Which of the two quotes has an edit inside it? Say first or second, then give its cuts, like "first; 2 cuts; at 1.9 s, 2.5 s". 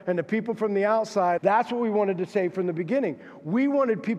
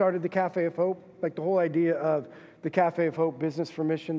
first; 1 cut; at 1.4 s